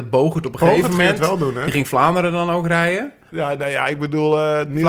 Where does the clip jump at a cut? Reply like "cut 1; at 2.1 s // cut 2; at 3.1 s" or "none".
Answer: cut 1; at 3.3 s